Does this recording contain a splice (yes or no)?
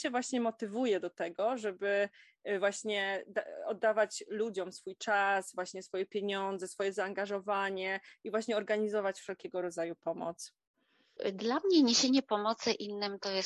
no